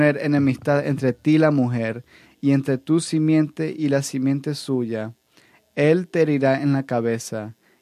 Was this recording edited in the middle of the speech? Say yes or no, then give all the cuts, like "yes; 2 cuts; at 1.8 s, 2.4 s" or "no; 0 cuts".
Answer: no; 0 cuts